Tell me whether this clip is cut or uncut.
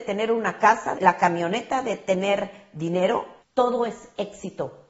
cut